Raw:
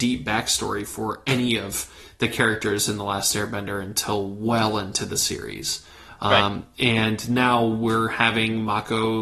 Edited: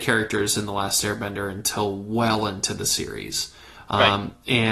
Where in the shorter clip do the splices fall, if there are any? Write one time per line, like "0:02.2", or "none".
none